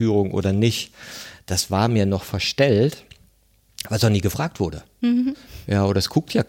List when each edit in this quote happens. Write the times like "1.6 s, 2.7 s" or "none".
none

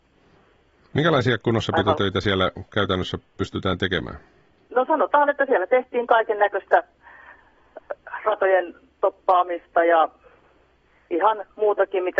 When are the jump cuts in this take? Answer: 4.7 s

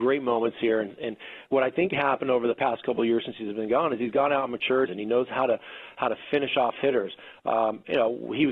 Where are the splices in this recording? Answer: 4.9 s

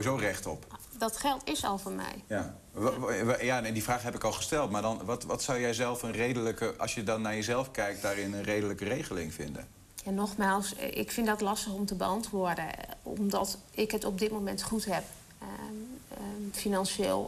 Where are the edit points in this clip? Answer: none

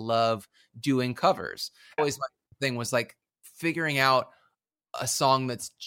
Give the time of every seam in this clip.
2.0 s

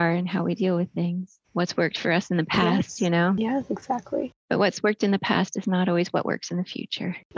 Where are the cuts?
1.4 s

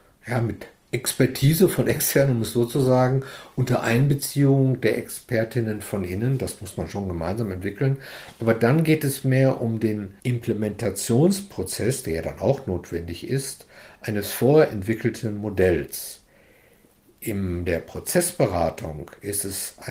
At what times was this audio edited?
10.2 s

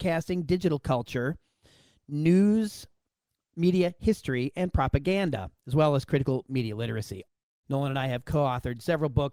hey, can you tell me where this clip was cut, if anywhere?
7.6 s

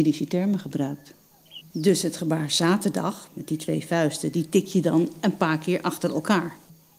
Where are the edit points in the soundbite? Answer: 1.6 s

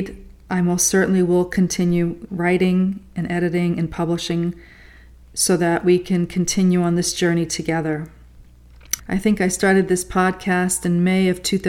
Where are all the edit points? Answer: 2.3 s, 9.0 s

